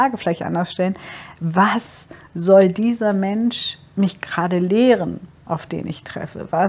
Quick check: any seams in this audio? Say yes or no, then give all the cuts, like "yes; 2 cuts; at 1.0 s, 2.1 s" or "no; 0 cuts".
no; 0 cuts